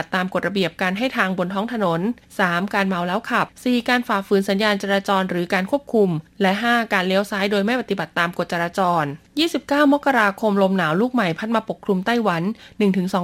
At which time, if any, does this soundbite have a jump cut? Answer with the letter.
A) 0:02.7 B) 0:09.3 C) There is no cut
B